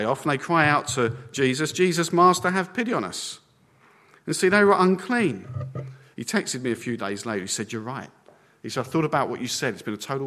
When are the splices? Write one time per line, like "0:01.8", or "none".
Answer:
0:06.1